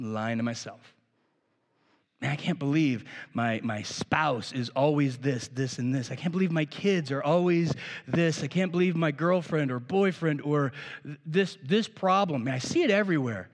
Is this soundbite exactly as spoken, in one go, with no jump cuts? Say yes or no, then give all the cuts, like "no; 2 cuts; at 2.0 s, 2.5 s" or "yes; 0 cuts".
yes; 0 cuts